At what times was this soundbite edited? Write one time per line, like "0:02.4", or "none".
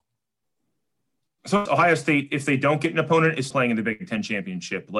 0:01.7
0:03.5